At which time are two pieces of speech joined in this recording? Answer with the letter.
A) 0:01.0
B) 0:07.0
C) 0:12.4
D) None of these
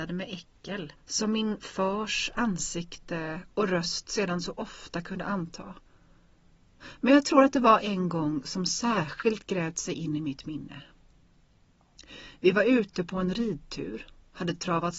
A